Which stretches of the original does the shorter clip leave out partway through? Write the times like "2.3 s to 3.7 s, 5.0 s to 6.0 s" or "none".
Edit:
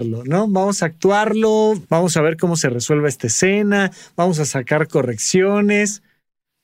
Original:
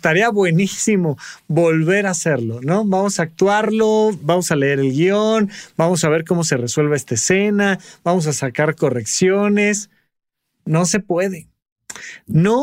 4.2 s to 5.7 s